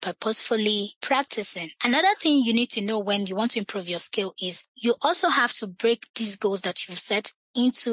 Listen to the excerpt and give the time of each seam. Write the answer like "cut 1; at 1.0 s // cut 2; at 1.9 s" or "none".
none